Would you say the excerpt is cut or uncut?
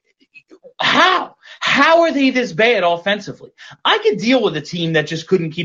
uncut